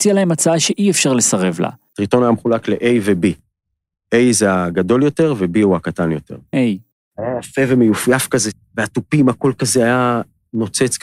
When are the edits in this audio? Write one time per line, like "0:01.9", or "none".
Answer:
0:01.9
0:06.5